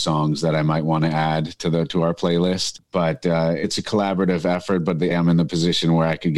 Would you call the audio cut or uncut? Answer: cut